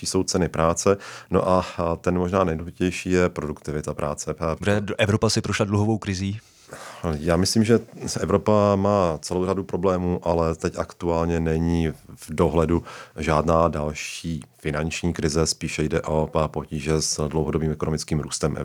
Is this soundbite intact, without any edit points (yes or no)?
no